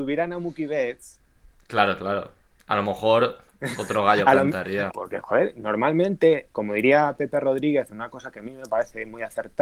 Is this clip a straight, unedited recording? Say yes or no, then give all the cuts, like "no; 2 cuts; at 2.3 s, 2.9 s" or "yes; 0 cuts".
no; 2 cuts; at 4.9 s, 6.5 s